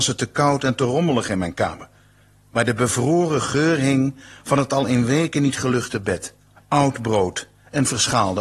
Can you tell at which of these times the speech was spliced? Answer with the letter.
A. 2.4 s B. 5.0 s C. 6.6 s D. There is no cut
C